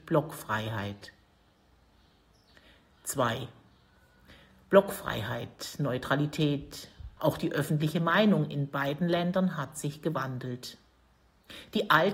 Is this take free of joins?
no; 1 cut; at 7.2 s

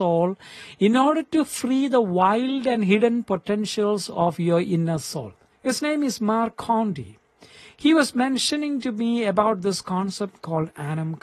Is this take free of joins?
no; 1 cut; at 5.5 s

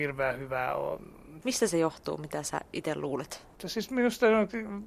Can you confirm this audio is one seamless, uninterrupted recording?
no; 2 cuts; at 1.4 s, 3.6 s

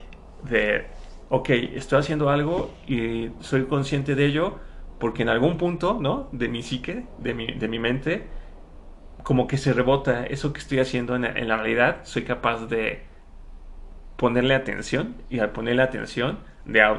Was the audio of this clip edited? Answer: no; 0 cuts

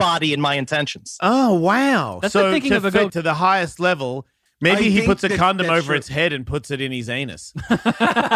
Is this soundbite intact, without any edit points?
no; 2 cuts; at 3.1 s, 4.5 s

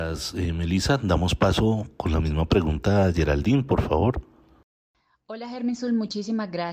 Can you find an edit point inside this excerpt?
no; 0 cuts

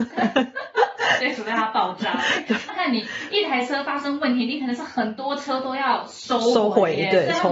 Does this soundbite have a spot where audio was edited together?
yes; 1 cut; at 2.7 s

